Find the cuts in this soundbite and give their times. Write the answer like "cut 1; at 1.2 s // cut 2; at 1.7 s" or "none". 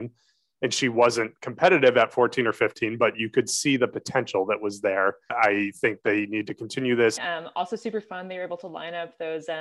cut 1; at 5.3 s // cut 2; at 7.2 s